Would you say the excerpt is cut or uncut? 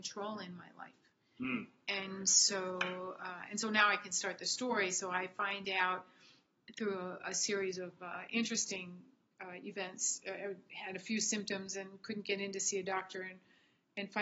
uncut